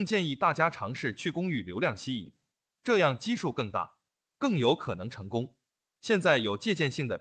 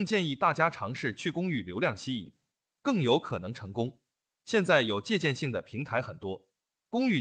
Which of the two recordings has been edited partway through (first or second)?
second